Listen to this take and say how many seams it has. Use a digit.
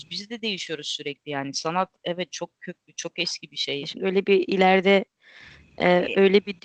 1